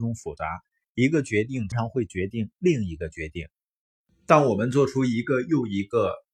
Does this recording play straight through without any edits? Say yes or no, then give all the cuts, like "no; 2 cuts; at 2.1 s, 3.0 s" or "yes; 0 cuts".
no; 1 cut; at 1.7 s